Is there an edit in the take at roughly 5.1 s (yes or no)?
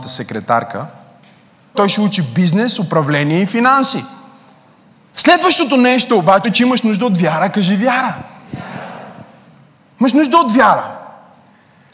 yes